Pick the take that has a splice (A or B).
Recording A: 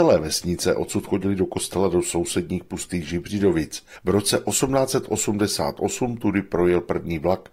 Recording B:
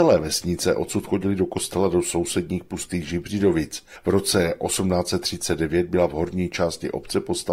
A